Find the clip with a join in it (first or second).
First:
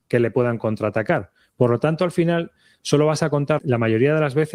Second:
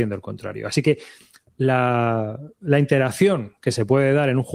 first